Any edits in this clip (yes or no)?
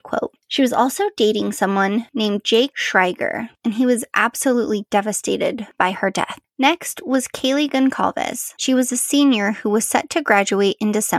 yes